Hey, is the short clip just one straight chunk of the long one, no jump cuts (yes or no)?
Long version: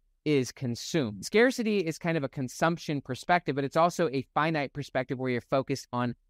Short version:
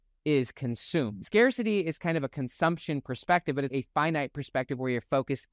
no